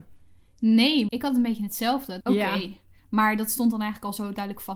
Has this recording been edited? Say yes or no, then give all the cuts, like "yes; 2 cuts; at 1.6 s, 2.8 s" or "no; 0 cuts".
yes; 2 cuts; at 1.1 s, 2.2 s